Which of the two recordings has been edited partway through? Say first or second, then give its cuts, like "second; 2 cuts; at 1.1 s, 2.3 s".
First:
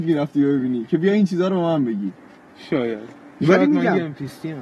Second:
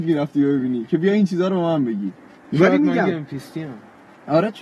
second; 1 cut; at 2.4 s